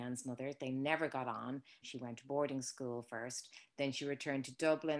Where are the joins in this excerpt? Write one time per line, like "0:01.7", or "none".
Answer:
0:01.8
0:03.7